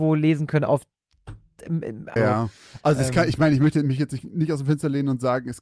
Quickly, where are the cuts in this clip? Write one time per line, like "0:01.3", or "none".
0:02.2